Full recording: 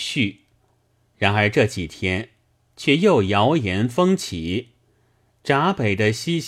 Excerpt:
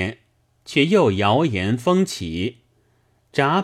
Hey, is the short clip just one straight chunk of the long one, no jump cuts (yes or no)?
yes